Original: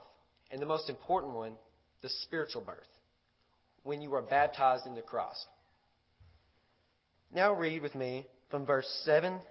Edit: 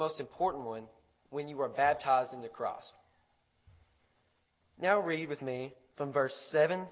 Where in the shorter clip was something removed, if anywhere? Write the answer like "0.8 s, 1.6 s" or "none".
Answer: 1.2 s

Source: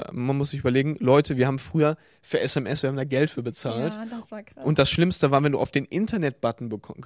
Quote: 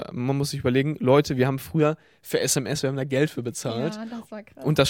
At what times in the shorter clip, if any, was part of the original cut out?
none

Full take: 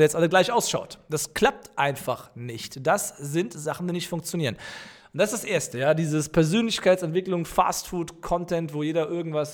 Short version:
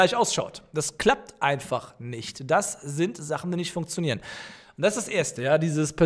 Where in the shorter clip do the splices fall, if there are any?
none

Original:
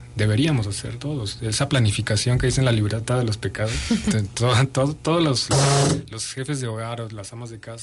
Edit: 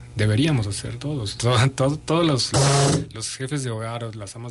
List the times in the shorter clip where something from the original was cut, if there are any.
1.4 s

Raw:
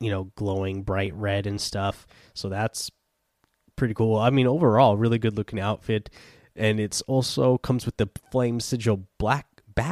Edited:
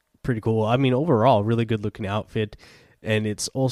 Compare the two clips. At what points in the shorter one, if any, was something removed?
none

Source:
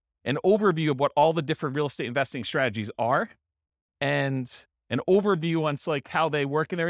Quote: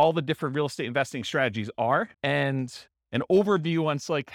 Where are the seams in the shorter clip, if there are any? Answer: 2.1 s

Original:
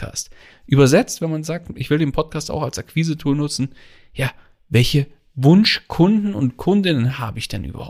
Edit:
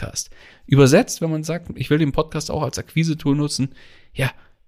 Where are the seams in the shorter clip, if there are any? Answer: none

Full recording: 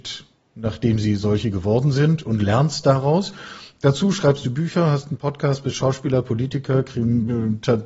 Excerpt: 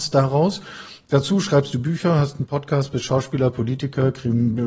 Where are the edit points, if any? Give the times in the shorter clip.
none

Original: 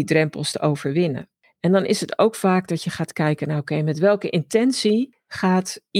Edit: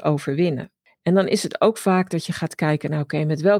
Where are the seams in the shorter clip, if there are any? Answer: none

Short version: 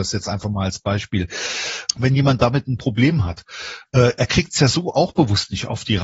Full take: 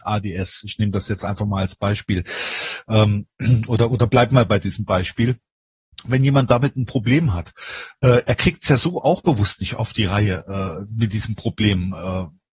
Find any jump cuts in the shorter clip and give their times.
1.9 s

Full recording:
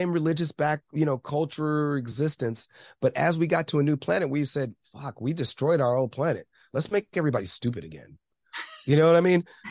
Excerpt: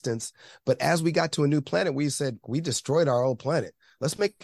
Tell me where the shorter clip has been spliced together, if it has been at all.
2.4 s

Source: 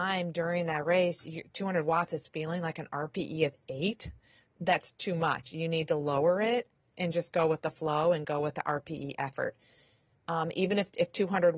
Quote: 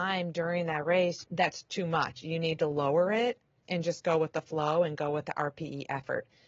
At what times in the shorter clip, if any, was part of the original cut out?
1.2 s

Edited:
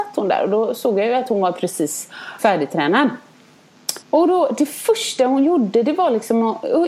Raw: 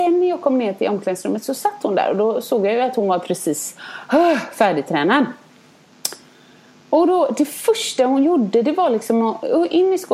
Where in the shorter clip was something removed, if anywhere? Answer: 2.4 s, 4.0 s

